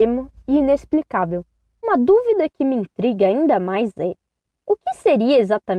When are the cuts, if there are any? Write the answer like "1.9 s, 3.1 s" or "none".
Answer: 1.8 s